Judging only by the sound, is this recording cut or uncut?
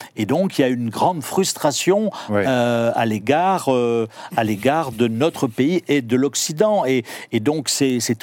uncut